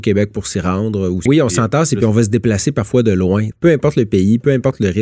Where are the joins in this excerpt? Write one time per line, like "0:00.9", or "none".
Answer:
0:01.3
0:03.5